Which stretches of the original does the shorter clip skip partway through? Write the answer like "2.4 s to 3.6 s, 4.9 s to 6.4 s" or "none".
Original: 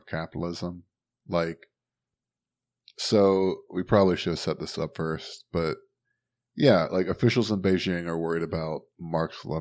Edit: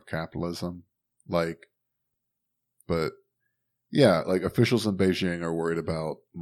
2.8 s to 5.5 s